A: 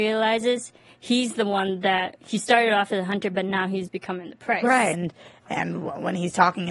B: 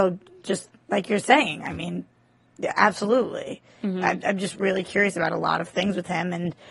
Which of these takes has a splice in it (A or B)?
A